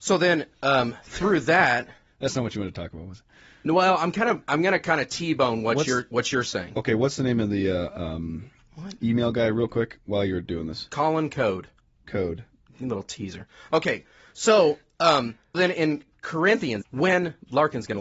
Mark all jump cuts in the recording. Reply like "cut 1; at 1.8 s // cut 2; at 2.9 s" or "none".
cut 1; at 15.5 s // cut 2; at 16.8 s